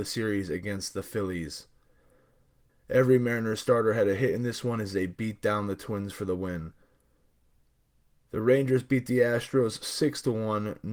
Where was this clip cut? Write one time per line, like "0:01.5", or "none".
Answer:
0:02.7